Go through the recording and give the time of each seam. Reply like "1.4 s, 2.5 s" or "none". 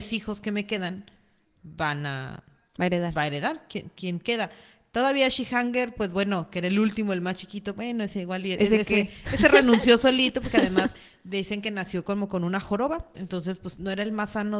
7.8 s, 13.1 s